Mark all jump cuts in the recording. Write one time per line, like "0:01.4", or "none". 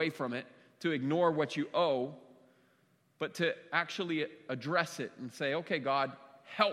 none

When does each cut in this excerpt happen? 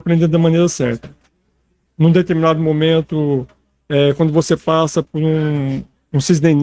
0:01.9

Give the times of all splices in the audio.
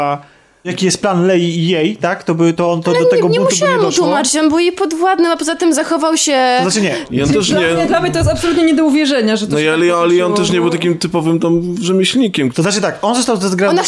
none

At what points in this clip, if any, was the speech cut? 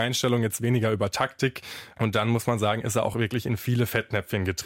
none

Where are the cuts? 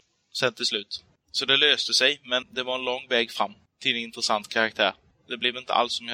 0:02.4

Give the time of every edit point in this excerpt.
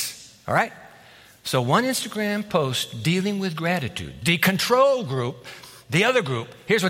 none

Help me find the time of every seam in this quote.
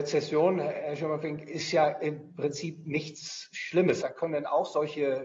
0:04.0

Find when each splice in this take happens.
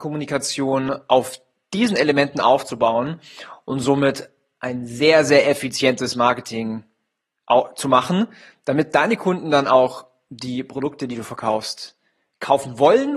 none

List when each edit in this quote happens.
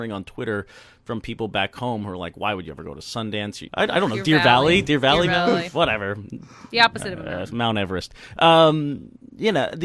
0:03.7

